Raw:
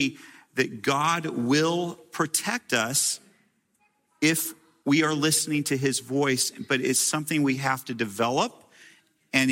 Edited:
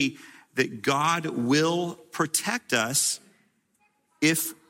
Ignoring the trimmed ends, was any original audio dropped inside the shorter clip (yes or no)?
no